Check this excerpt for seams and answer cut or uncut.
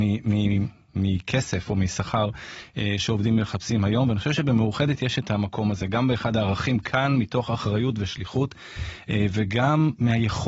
uncut